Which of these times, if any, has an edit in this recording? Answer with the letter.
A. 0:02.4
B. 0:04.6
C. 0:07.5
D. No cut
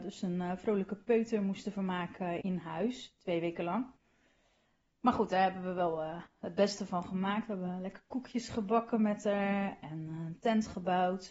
A